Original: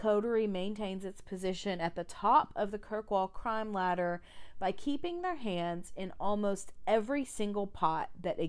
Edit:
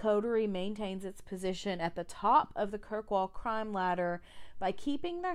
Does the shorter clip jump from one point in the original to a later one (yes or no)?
no